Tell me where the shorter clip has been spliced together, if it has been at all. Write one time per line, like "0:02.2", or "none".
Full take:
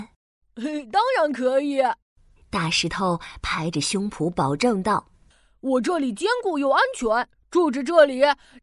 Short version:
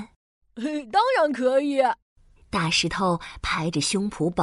none